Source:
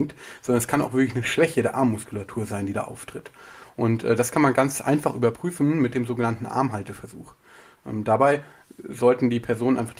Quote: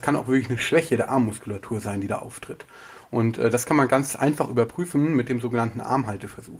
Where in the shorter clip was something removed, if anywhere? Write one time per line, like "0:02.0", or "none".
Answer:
none

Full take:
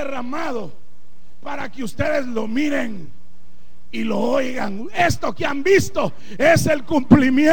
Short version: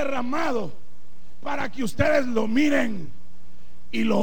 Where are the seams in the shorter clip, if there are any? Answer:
none

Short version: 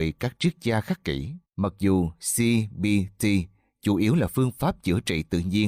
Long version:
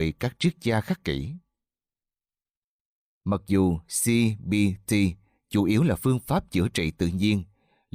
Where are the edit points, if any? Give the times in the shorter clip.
0:01.4

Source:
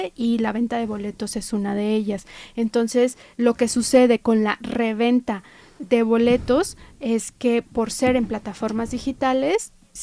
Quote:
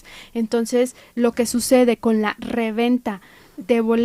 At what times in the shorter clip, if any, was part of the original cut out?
none

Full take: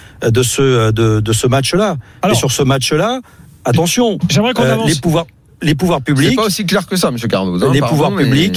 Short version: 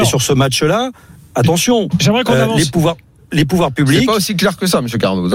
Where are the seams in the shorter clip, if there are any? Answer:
none

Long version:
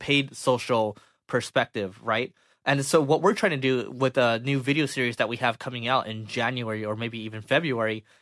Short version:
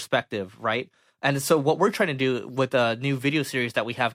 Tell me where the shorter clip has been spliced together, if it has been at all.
none

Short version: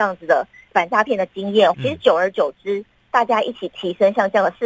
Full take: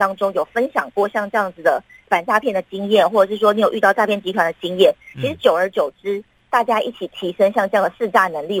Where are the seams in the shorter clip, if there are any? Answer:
0:01.7

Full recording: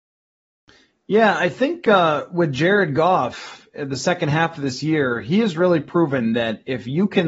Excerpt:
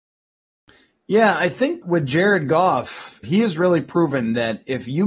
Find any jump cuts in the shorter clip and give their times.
0:01.8
0:03.2

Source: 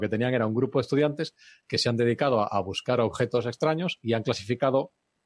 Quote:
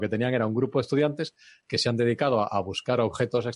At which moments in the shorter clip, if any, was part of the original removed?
none

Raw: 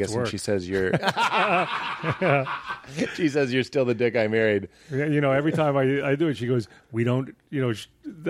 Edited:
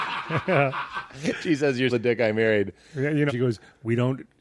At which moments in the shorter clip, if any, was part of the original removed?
0:01.9
0:03.3

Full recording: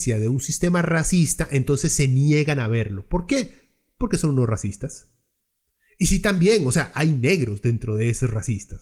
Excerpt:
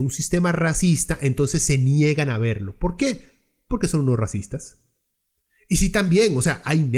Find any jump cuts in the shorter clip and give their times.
none

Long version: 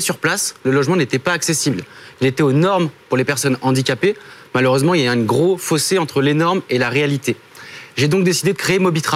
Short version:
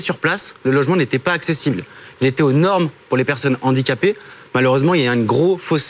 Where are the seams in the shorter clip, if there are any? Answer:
none

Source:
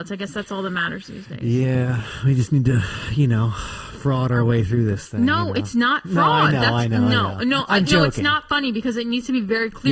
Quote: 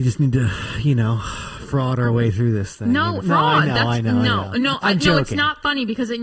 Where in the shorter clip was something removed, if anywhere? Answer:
0:03.2

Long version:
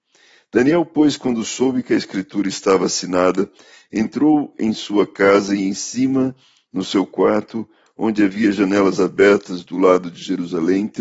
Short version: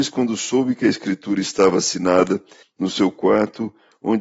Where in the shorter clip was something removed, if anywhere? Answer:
0:02.6

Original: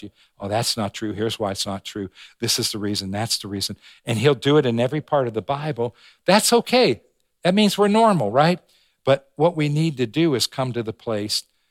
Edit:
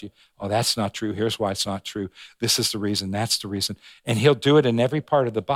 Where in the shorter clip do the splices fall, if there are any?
none

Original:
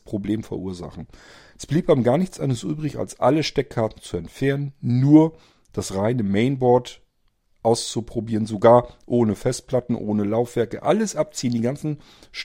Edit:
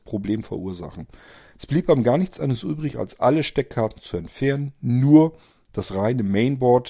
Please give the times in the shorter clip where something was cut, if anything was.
none

